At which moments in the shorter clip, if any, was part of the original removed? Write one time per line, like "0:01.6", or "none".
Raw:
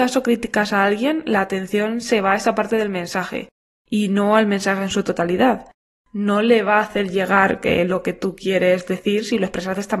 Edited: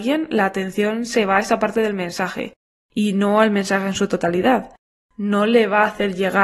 none